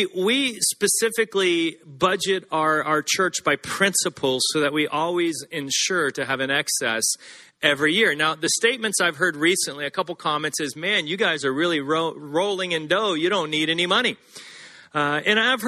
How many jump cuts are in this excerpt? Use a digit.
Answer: 0